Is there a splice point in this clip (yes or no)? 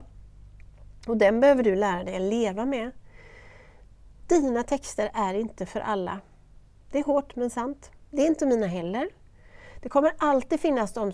no